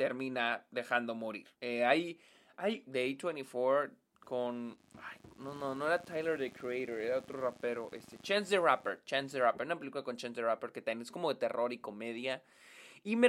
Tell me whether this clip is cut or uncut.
cut